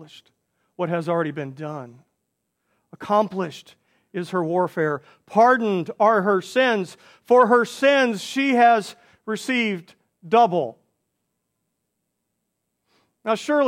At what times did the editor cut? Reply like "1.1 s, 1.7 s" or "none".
none